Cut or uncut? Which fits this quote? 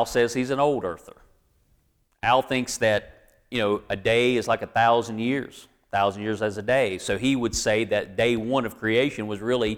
uncut